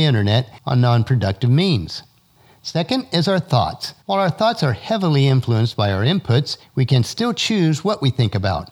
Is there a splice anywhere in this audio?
no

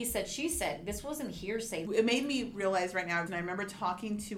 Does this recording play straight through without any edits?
no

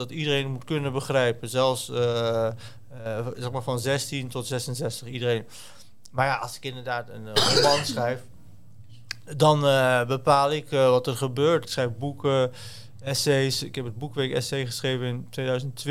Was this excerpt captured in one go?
no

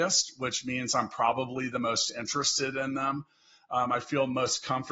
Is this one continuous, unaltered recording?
yes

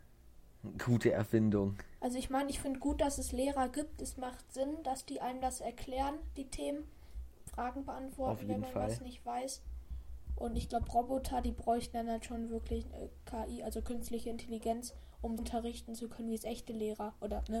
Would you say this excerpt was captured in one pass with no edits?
no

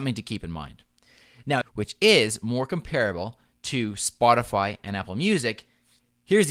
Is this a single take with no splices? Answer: no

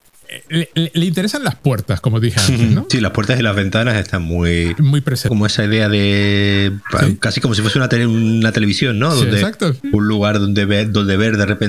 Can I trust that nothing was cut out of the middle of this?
no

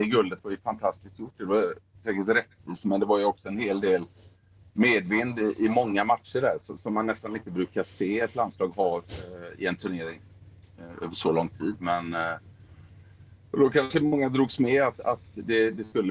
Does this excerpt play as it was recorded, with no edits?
yes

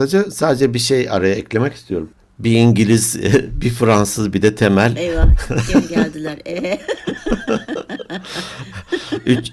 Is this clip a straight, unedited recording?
yes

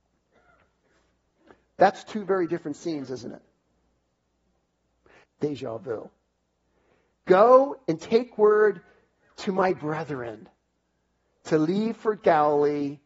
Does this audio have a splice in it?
yes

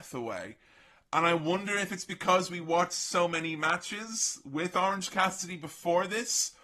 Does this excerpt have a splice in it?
no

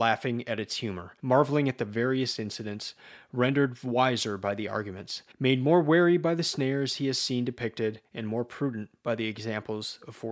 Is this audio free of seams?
no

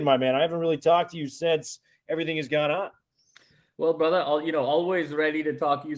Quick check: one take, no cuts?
yes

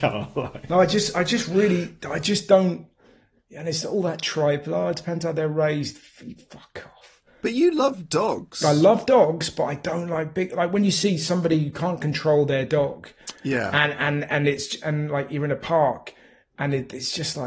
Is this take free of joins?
yes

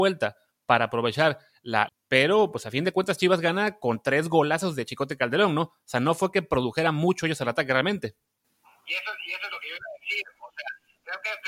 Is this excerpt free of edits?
no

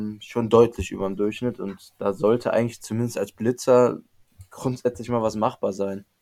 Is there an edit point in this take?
no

